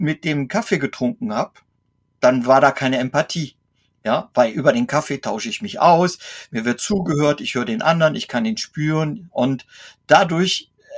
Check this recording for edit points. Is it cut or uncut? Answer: uncut